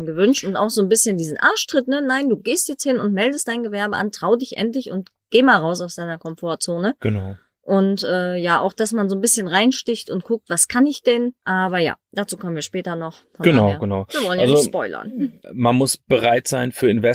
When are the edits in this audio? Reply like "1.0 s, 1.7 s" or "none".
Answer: 15.4 s